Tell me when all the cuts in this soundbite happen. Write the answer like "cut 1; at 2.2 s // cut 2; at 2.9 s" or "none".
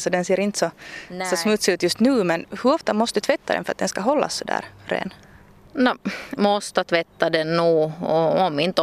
cut 1; at 6.4 s